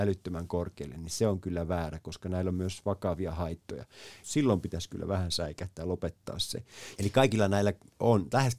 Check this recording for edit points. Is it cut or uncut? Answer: cut